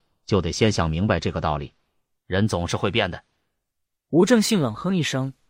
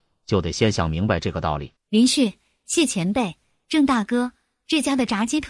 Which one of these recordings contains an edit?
second; 1 cut; at 1.8 s

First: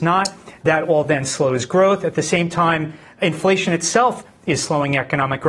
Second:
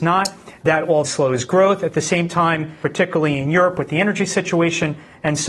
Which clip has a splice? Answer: second; 2 cuts; at 1.0 s, 2.8 s

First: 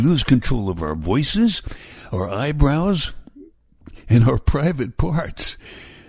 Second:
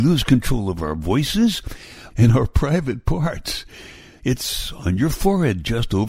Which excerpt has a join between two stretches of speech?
second; 2 cuts; at 2.1 s, 4.2 s

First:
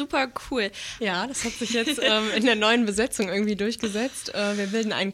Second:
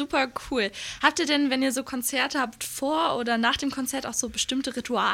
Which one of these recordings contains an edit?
first; 1 cut; at 1.0 s

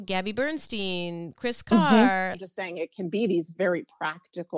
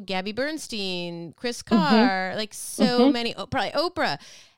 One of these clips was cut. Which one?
first; 1 cut; at 2.3 s

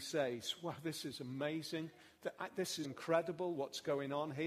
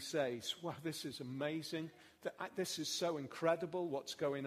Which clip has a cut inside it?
first; 1 cut; at 2.8 s

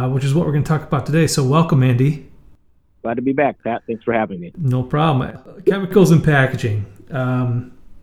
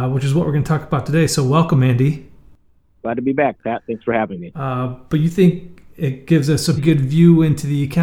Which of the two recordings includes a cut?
second; 2 cuts; at 4.5 s, 6.8 s

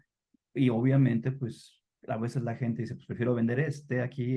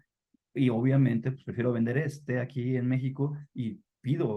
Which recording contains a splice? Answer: second; 1 cut; at 1.3 s

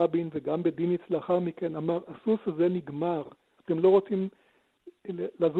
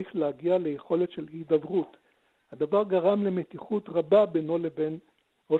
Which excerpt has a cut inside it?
first; 1 cut; at 3.6 s

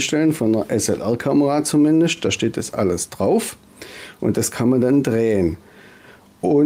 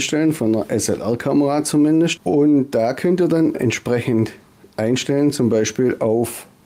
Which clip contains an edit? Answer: second; 2 cuts; at 2.2 s, 3.5 s

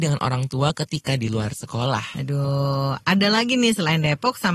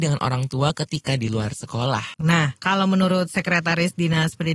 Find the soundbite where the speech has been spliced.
second; 1 cut; at 2.1 s

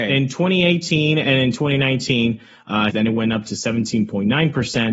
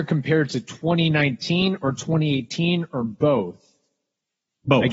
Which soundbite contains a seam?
first; 1 cut; at 2.9 s

